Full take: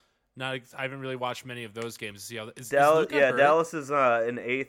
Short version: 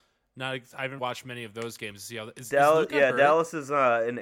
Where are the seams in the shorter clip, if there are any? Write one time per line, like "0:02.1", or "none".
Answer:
0:01.0